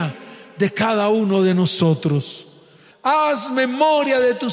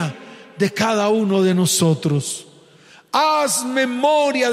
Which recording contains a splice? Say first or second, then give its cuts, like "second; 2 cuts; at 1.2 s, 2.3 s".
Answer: first; 1 cut; at 2.9 s